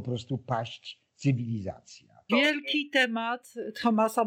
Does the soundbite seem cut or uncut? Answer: cut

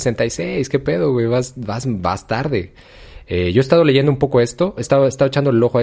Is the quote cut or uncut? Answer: cut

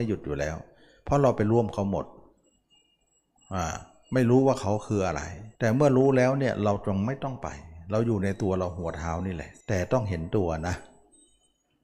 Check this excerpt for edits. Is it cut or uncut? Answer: cut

